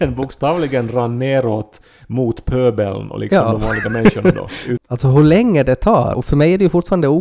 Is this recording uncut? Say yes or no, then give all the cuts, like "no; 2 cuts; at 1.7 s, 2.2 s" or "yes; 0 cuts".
no; 2 cuts; at 4.8 s, 6.1 s